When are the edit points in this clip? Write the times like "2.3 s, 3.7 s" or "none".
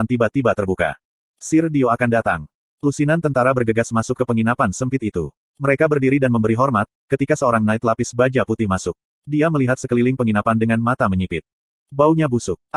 9.2 s